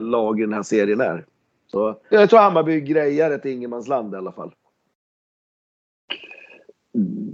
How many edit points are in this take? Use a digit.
1